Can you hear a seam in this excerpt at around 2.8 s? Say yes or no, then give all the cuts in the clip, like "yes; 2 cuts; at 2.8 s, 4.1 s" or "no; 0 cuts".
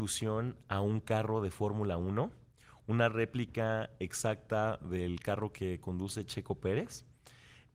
no; 0 cuts